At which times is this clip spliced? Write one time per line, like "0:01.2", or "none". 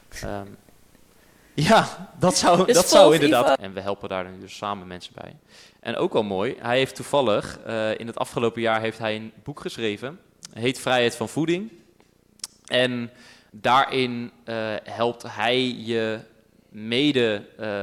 0:03.6